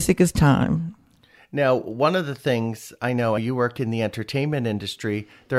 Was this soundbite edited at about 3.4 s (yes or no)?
yes